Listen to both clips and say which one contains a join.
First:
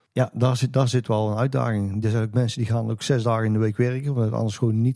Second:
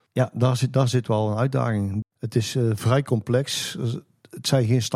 second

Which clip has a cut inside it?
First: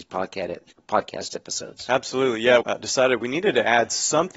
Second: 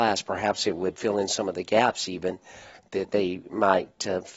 first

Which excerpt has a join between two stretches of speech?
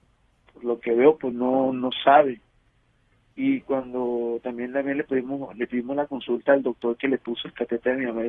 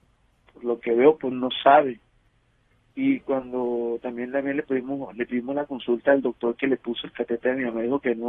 second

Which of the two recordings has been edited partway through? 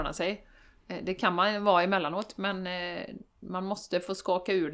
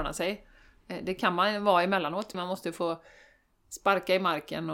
second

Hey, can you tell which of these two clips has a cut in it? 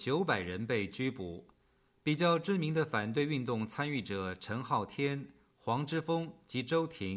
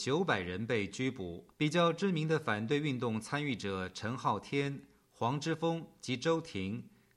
second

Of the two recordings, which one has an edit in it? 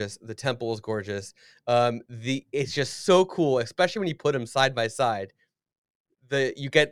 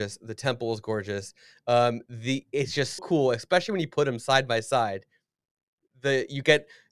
second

